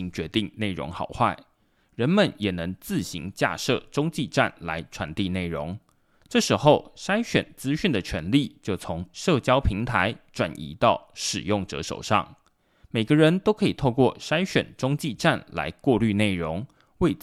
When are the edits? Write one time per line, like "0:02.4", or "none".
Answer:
none